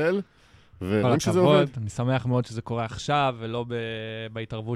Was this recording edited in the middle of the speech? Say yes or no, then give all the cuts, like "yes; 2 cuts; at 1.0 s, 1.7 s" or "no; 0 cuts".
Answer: no; 0 cuts